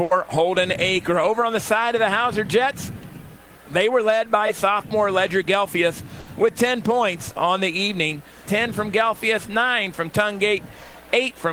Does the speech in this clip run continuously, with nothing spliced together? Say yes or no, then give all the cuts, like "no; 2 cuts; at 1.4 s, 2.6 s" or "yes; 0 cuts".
no; 1 cut; at 8.4 s